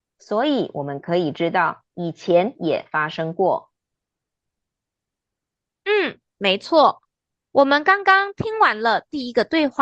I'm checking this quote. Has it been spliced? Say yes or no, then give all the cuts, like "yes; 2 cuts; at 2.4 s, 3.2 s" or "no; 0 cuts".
no; 0 cuts